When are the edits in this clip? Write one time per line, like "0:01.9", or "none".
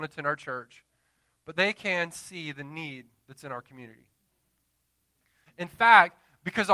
0:05.5